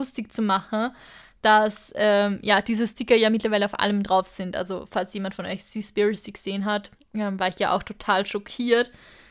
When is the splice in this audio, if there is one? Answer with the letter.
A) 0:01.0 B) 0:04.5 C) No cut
C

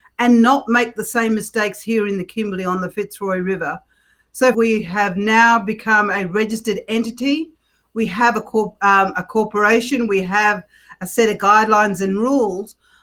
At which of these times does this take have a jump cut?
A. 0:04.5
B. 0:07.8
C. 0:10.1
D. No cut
A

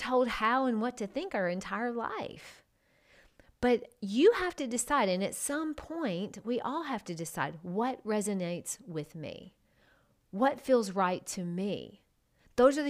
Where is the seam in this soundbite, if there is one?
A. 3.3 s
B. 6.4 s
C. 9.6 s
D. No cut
D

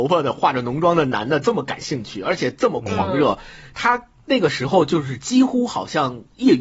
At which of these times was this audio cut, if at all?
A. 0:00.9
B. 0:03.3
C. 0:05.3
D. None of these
D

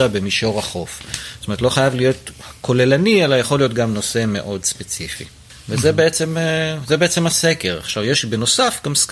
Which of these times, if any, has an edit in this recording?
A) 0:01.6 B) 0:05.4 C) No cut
C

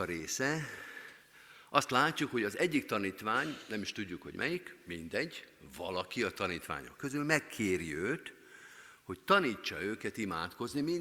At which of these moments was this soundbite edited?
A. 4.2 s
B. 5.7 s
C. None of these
C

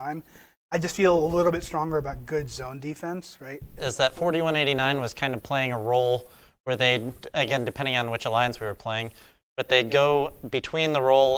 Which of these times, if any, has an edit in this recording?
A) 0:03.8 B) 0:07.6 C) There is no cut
A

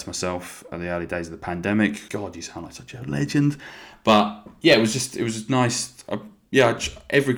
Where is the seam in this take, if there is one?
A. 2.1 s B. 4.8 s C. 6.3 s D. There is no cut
A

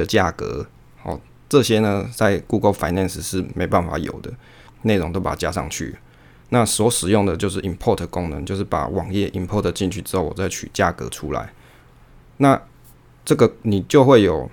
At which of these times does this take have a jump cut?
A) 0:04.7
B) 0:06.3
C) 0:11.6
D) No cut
A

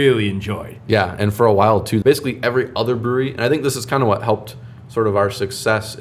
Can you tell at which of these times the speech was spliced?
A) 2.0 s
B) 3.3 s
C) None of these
A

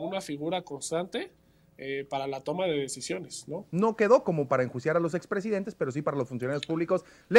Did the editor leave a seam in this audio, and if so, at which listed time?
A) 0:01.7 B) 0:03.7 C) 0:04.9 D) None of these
B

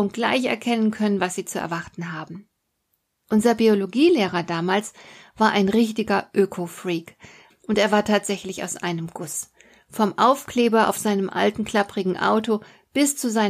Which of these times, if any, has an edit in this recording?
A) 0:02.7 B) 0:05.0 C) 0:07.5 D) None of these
C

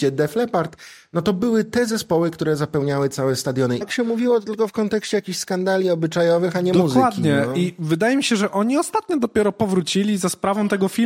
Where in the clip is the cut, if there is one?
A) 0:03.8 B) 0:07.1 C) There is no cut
A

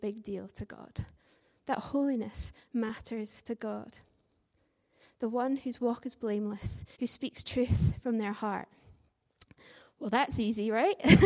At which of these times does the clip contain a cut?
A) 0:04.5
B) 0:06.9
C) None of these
B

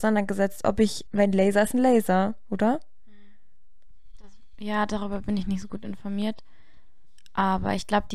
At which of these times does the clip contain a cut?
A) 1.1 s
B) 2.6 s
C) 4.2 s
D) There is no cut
A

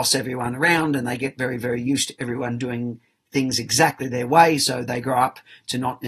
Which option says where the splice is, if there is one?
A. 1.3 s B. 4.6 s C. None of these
C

